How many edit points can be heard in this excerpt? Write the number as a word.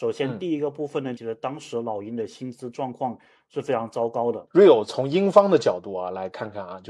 two